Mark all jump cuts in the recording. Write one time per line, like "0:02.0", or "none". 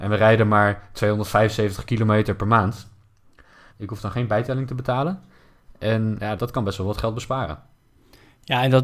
0:03.7
0:06.4